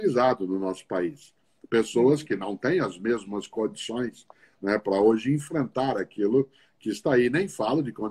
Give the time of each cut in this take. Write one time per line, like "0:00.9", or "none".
none